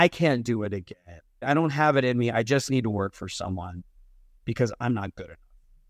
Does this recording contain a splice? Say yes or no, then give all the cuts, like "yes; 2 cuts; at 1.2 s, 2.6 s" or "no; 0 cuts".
yes; 1 cut; at 1.4 s